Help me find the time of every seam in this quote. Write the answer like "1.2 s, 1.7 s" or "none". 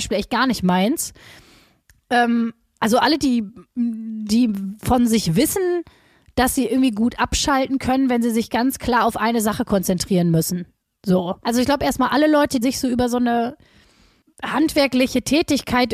11.4 s, 12.6 s